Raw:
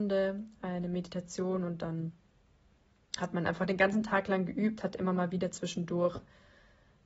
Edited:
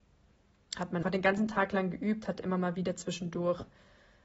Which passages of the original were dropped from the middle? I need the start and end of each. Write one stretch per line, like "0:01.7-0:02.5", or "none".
0:03.4-0:03.6